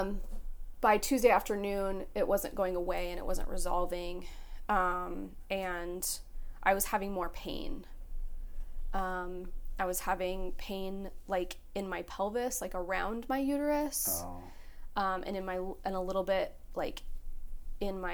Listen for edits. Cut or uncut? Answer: uncut